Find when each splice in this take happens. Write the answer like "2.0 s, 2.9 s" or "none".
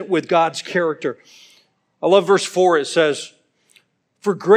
none